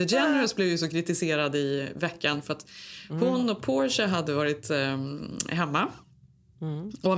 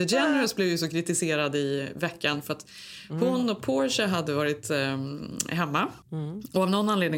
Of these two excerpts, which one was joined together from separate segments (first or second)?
second